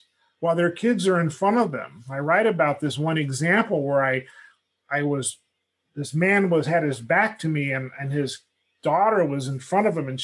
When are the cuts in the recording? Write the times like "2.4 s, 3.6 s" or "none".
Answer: none